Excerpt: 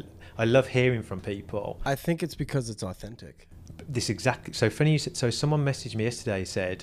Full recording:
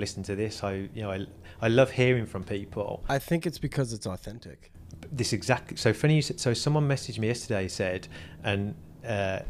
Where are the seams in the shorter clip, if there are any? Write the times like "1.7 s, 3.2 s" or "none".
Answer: none